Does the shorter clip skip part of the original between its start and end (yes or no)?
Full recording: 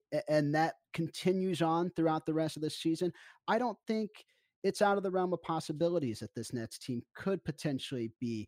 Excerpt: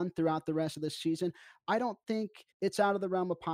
yes